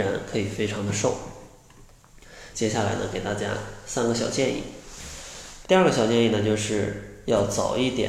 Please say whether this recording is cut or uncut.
cut